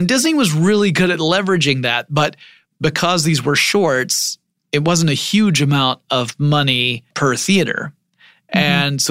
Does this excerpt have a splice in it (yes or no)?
no